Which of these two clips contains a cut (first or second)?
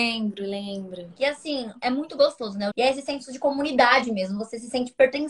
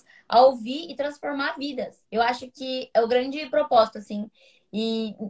first